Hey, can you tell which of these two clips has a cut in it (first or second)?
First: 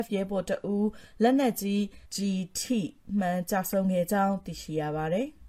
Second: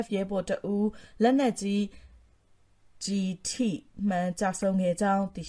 first